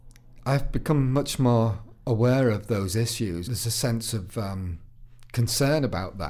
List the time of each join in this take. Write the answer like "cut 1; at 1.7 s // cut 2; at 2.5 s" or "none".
cut 1; at 3.4 s